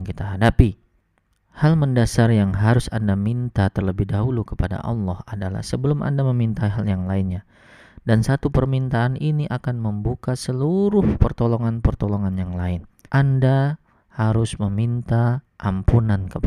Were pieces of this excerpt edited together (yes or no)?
yes